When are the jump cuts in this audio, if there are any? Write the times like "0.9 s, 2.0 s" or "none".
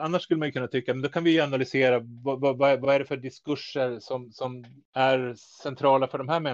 none